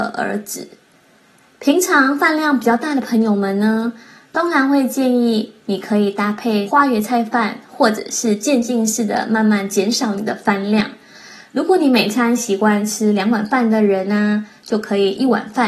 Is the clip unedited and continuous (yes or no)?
yes